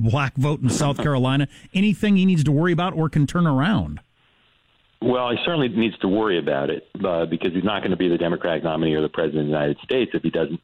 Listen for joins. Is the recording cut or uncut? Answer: uncut